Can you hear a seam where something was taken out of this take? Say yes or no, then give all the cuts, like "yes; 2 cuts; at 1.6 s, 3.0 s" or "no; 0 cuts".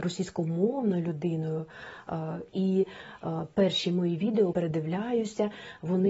yes; 2 cuts; at 2.5 s, 4.5 s